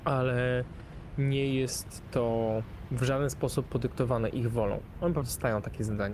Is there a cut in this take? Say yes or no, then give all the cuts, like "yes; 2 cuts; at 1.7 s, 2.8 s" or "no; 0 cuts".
no; 0 cuts